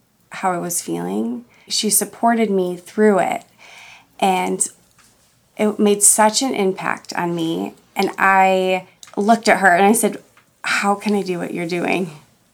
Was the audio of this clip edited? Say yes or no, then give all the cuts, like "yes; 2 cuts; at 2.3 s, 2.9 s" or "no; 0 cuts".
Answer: yes; 1 cut; at 1.7 s